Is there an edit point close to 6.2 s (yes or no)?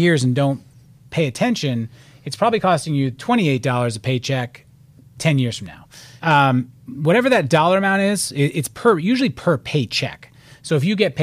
yes